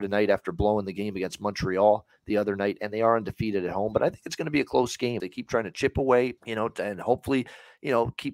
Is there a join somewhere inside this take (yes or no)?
yes